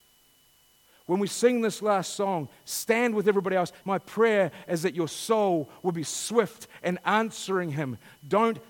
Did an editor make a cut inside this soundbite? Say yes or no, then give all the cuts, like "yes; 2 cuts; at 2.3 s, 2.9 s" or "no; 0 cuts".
yes; 1 cut; at 3.8 s